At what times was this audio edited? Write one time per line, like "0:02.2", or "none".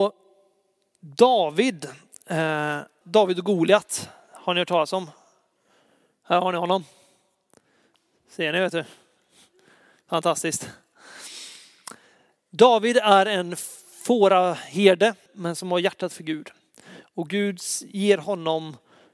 0:03.0
0:15.3